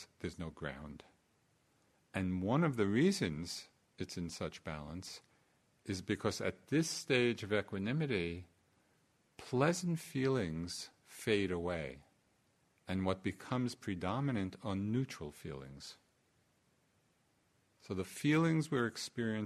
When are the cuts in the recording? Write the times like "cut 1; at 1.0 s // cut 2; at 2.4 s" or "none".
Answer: cut 1; at 1.9 s